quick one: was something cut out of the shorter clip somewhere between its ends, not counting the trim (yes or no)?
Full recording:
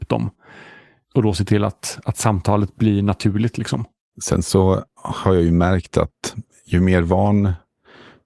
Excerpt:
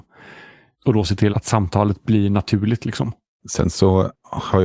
yes